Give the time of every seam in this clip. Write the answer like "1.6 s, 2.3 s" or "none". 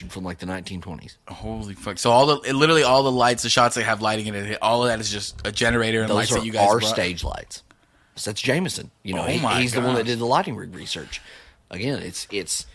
8.2 s